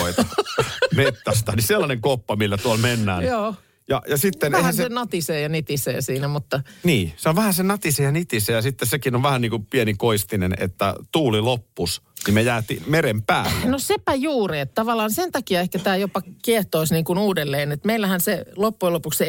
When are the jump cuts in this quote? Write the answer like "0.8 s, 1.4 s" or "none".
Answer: none